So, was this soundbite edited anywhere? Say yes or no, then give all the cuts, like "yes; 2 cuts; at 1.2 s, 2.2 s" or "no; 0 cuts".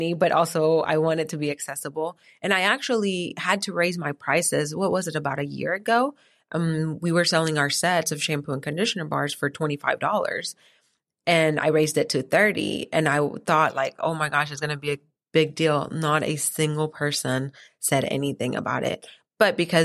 no; 0 cuts